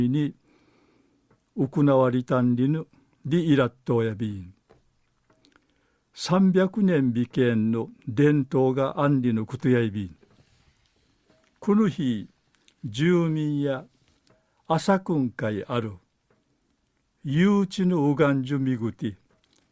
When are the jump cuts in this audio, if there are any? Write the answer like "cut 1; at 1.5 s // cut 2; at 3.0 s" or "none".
none